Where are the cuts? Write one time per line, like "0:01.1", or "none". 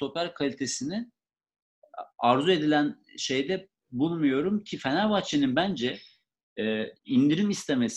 0:07.0